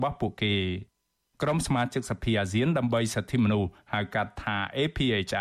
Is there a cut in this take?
no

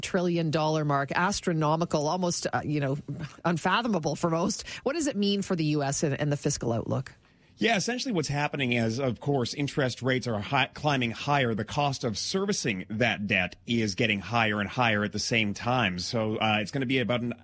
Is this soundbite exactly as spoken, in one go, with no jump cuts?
yes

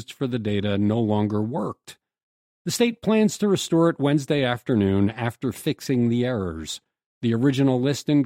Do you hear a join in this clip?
no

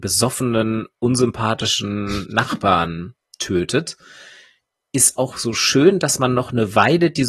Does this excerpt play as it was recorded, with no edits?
yes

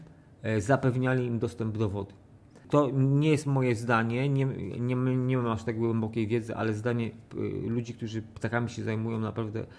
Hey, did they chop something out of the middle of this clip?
no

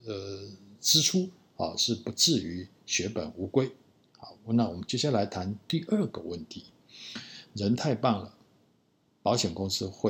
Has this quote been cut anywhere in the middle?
no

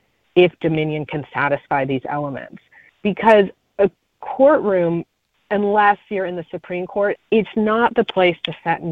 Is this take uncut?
no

